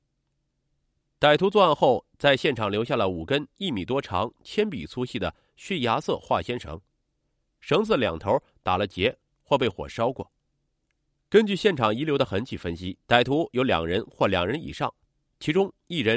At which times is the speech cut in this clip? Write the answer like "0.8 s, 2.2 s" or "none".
11.1 s, 13.0 s